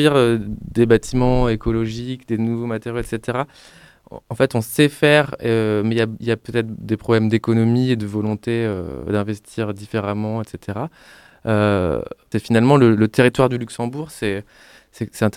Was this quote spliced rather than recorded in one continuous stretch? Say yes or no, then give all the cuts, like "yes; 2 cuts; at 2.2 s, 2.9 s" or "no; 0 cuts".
yes; 1 cut; at 12.3 s